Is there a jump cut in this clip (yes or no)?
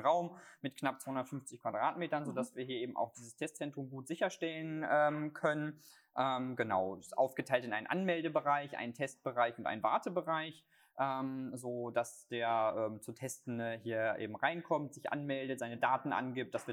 no